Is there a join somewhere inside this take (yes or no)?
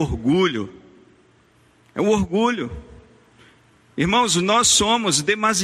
no